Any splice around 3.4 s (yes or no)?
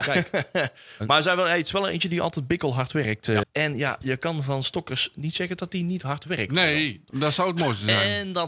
yes